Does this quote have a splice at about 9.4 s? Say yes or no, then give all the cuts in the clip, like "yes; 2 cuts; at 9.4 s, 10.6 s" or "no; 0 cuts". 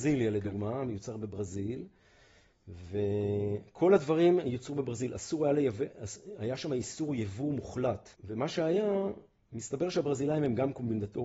no; 1 cut; at 8.1 s